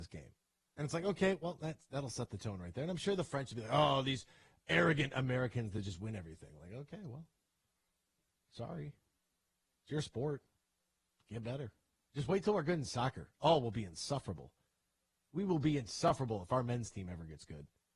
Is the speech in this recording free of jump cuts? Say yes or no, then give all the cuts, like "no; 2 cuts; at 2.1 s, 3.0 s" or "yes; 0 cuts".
yes; 0 cuts